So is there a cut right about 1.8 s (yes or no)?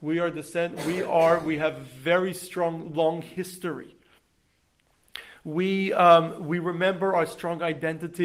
no